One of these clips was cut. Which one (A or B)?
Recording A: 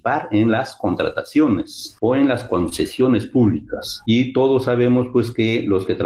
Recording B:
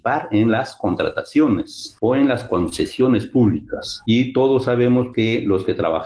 B